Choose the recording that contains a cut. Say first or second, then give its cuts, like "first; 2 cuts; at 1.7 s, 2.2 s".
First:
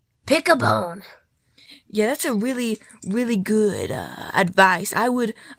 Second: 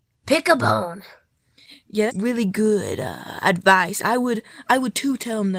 second; 1 cut; at 2.1 s